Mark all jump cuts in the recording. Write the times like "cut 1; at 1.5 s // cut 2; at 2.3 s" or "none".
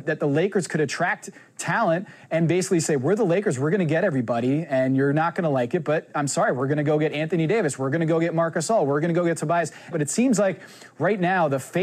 cut 1; at 9.9 s